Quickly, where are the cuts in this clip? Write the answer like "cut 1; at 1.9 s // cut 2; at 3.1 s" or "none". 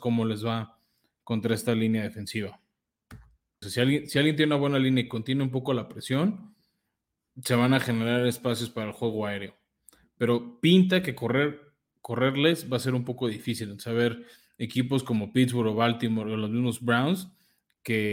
cut 1; at 3.6 s